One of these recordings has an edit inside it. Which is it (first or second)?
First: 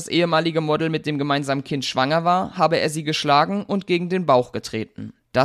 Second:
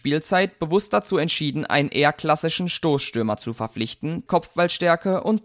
second